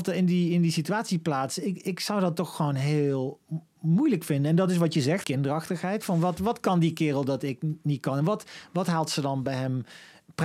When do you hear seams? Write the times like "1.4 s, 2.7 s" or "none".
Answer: 5.2 s

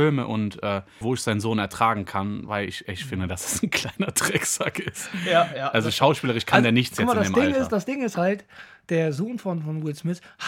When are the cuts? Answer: 1.0 s

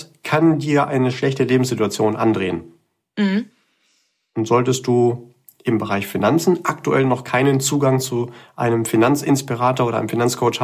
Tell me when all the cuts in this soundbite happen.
none

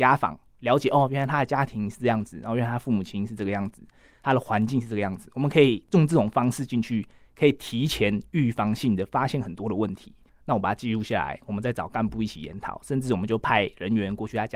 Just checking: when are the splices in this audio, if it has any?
10.3 s

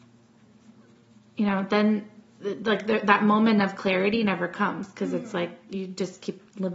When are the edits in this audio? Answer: none

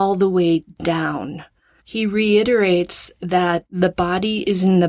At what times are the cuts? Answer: 1.8 s

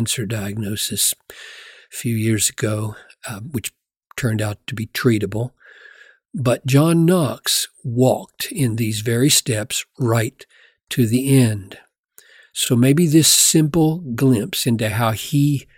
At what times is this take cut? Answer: none

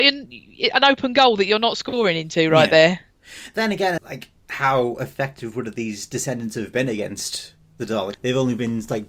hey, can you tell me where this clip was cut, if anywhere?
4.0 s, 8.1 s

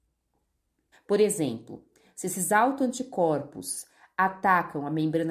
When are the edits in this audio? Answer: 0.9 s

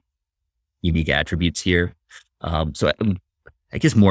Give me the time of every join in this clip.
none

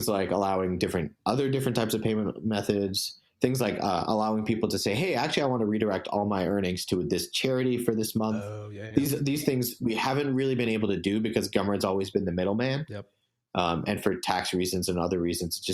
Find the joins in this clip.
none

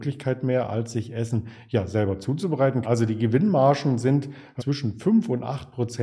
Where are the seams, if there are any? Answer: 2.8 s, 4.6 s

